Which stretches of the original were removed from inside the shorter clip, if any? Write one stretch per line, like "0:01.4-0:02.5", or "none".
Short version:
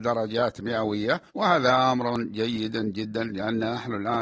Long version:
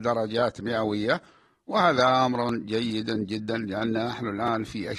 0:01.3-0:01.6